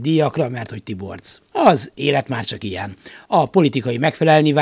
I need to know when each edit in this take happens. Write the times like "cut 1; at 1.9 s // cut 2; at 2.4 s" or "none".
none